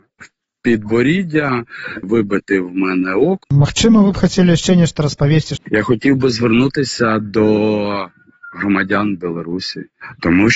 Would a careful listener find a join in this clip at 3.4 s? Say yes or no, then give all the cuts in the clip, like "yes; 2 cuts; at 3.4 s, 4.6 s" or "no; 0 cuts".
yes; 3 cuts; at 2.0 s, 3.4 s, 5.6 s